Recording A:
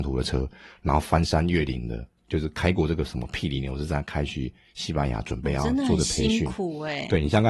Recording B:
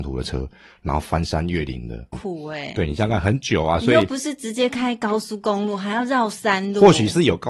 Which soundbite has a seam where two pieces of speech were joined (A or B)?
B